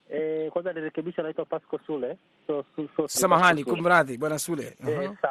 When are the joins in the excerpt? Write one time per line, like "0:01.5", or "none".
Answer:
0:03.1